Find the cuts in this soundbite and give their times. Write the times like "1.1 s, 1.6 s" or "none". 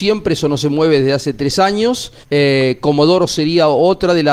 2.2 s